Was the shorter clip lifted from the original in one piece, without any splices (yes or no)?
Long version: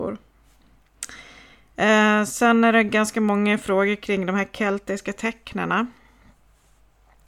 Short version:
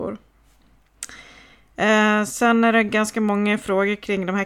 yes